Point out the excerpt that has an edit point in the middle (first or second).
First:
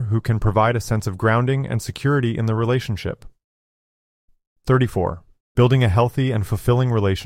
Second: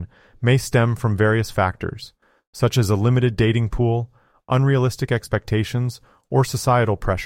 first